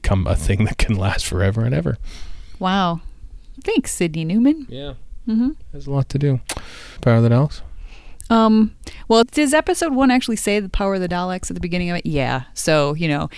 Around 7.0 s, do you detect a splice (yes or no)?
yes